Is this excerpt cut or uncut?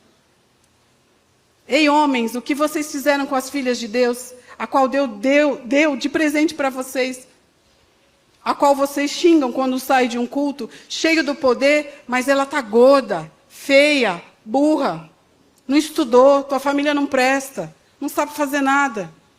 uncut